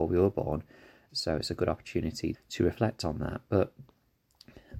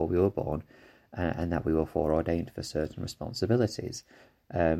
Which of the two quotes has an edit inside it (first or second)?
first